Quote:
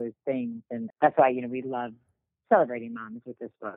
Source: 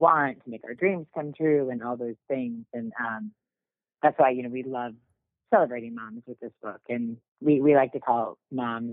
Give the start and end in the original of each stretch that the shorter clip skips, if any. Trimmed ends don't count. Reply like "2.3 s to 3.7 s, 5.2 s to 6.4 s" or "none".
2.9 s to 3.9 s